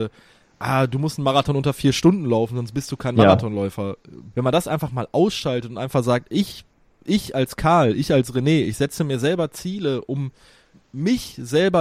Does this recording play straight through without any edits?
no; 2 cuts; at 4.3 s, 10.7 s

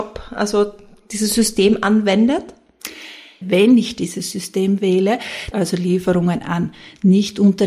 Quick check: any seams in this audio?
yes; 2 cuts; at 3.4 s, 5.5 s

